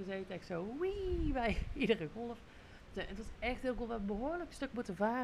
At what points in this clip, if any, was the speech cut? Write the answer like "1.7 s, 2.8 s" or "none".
none